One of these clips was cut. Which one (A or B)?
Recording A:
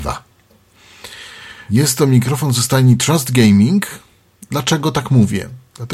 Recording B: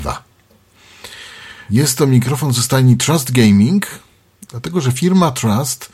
B